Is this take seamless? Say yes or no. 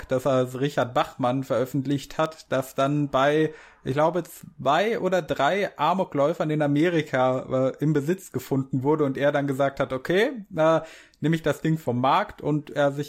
yes